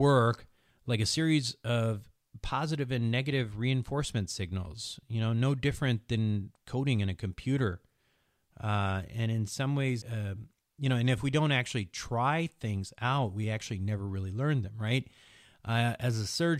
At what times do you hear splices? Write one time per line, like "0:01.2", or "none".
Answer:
0:10.0